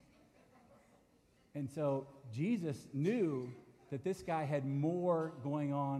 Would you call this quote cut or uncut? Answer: uncut